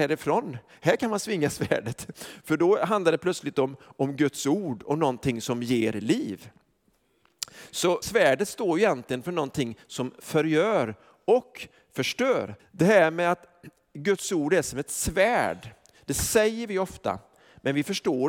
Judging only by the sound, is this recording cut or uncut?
cut